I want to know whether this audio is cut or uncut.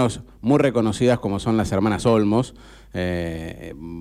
uncut